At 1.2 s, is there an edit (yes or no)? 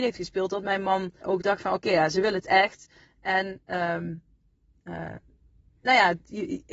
yes